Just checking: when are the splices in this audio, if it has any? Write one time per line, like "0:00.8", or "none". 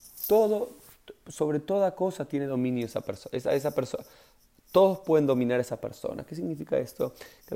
none